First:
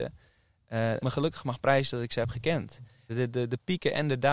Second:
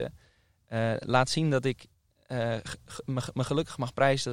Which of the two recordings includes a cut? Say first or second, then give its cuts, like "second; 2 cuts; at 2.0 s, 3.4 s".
first; 2 cuts; at 1.0 s, 3.1 s